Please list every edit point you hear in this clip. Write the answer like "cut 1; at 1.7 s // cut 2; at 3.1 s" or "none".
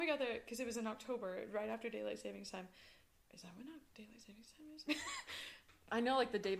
cut 1; at 4.9 s